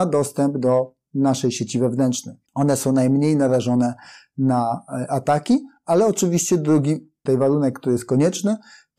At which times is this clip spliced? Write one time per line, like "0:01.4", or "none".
0:02.4